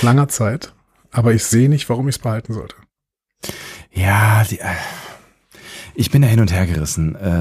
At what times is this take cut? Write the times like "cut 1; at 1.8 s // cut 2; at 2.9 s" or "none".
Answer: none

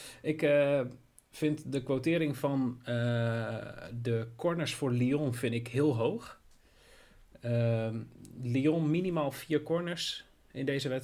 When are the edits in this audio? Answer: none

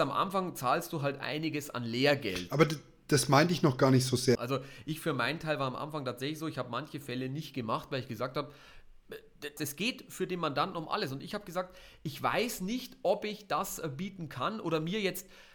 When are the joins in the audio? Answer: cut 1; at 4.4 s // cut 2; at 9.6 s

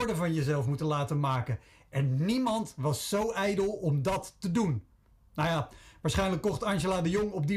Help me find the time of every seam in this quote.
none

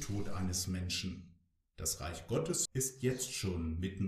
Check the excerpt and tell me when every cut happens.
cut 1; at 2.7 s

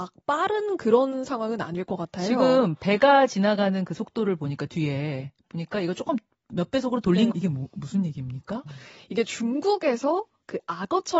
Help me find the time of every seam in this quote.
cut 1; at 7.3 s // cut 2; at 8.7 s

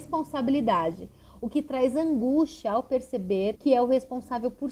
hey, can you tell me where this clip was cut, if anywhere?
cut 1; at 3.6 s

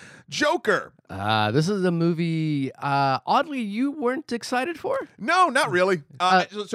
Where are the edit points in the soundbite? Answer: none

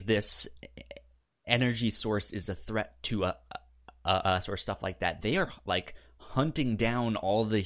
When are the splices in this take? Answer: none

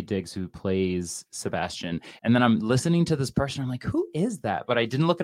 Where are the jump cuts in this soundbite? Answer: cut 1; at 2.2 s

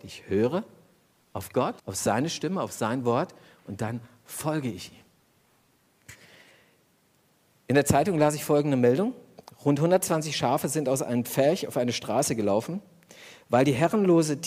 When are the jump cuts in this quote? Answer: cut 1; at 1.8 s

